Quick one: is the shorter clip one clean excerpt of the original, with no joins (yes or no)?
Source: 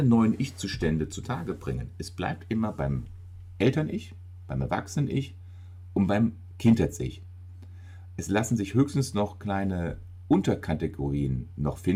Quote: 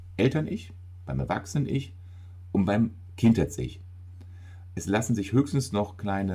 yes